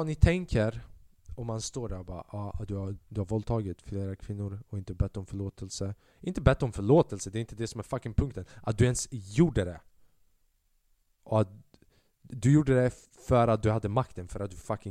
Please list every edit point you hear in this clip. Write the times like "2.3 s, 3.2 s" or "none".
3.0 s